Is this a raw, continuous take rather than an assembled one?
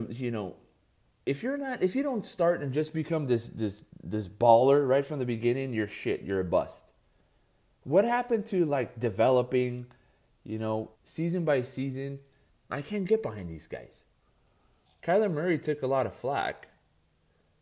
no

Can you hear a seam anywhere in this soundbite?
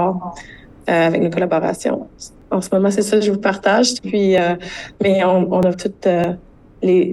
yes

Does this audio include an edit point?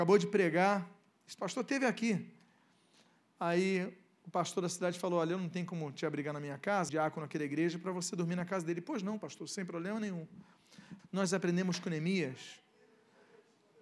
yes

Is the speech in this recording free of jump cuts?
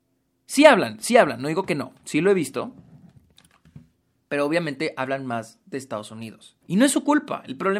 no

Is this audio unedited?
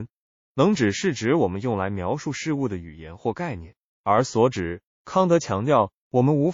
no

